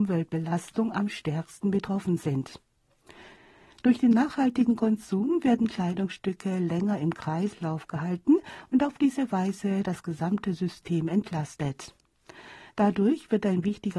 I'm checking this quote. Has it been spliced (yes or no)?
no